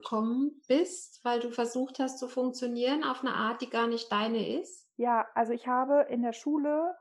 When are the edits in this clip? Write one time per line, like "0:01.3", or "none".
none